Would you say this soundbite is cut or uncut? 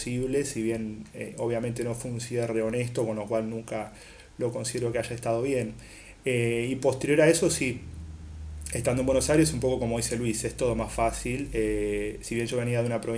uncut